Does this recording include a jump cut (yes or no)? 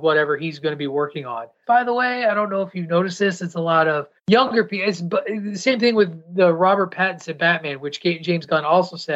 yes